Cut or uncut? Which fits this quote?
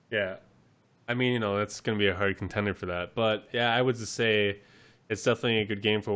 uncut